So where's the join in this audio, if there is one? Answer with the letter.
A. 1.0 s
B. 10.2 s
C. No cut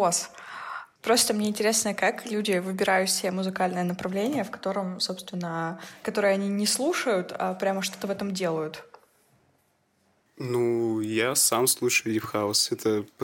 A